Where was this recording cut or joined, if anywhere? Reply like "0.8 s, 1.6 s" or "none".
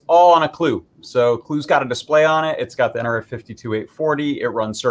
none